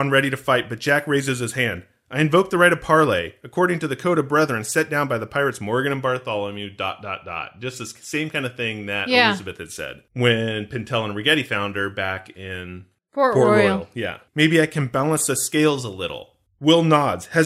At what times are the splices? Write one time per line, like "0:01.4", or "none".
0:14.3

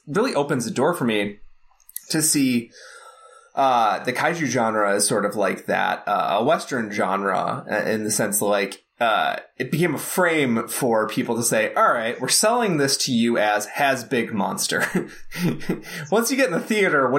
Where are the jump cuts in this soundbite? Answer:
none

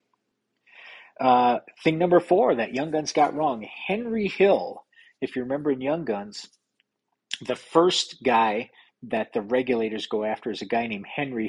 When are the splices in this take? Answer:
none

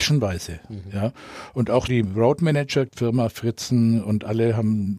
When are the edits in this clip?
0:01.9
0:02.9

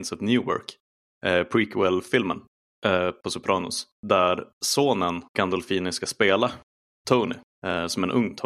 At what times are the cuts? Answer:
0:03.9
0:05.3

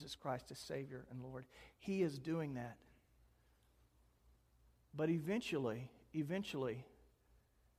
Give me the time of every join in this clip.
none

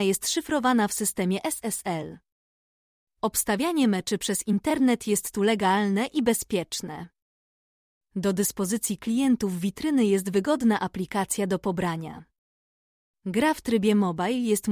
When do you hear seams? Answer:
none

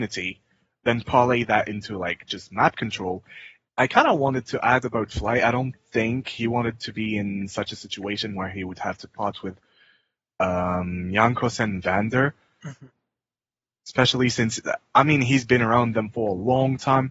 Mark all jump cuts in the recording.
0:03.7

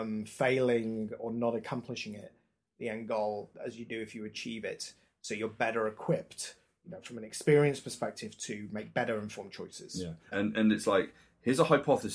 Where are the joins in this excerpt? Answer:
0:10.3

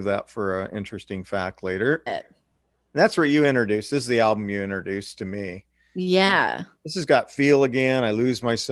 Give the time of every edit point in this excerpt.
0:02.1

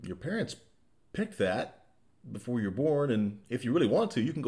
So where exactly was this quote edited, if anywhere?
none

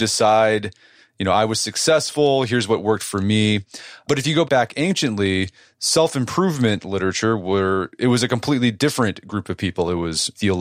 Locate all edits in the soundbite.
none

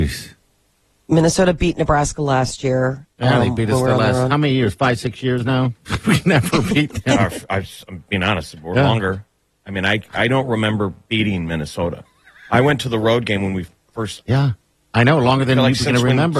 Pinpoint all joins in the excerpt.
0:05.9
0:14.2

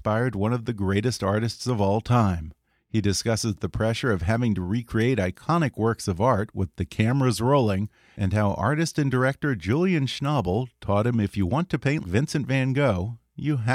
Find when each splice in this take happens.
0:12.0

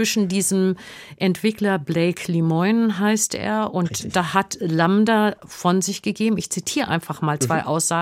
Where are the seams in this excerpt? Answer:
none

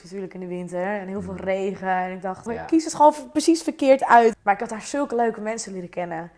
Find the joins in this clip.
0:02.5
0:04.3

